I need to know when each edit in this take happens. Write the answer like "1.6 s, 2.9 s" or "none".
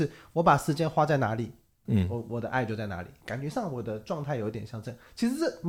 1.9 s